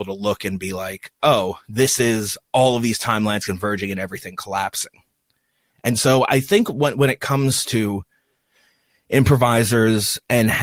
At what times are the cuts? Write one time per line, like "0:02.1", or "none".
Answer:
none